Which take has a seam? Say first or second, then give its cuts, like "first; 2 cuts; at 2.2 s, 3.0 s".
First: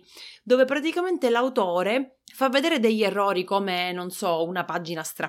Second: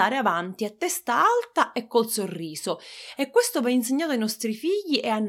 first; 1 cut; at 2.2 s